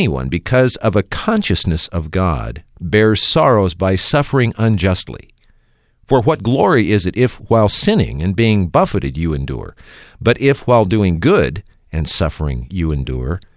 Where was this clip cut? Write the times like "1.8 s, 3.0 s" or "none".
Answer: none